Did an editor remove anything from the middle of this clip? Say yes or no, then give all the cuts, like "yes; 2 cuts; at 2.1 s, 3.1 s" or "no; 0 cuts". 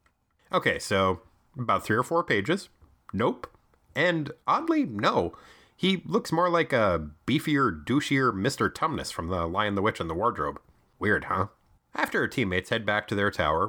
no; 0 cuts